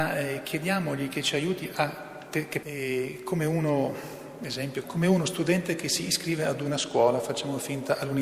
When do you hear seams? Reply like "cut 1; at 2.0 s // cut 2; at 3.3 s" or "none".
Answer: cut 1; at 2.6 s // cut 2; at 4.8 s